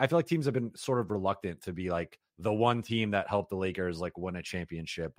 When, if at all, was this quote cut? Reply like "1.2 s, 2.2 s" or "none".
2.3 s